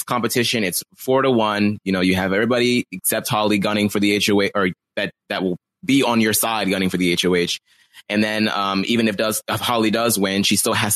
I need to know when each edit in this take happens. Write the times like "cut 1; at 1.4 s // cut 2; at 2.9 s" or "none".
none

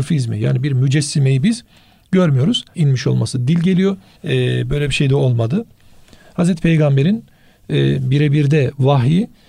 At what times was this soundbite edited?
cut 1; at 2.7 s // cut 2; at 4.2 s

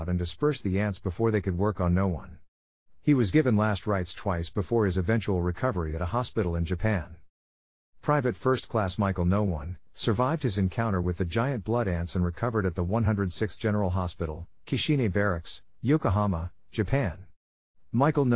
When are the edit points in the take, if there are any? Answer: cut 1; at 9.9 s

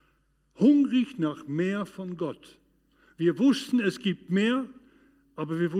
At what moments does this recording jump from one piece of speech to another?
none

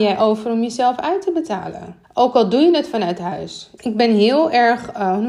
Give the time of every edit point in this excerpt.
cut 1; at 2.0 s // cut 2; at 3.8 s

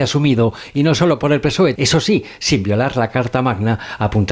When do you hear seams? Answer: cut 1; at 1.8 s

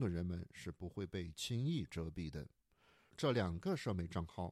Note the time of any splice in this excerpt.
cut 1; at 3.1 s

